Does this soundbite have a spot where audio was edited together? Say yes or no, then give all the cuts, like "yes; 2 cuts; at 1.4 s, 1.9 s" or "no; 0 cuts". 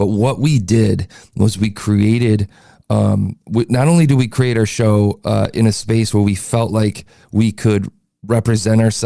no; 0 cuts